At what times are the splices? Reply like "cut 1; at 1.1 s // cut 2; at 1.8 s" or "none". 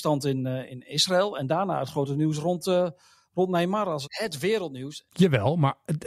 cut 1; at 4.0 s // cut 2; at 5.0 s